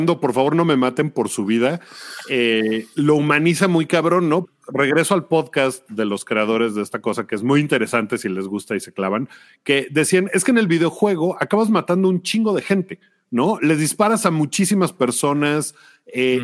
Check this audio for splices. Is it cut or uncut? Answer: cut